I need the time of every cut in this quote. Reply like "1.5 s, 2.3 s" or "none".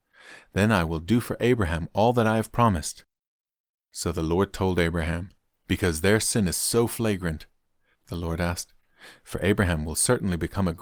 5.7 s, 7.9 s